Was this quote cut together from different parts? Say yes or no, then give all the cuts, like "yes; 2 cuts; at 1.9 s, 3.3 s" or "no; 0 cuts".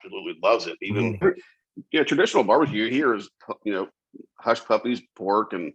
yes; 1 cut; at 1.2 s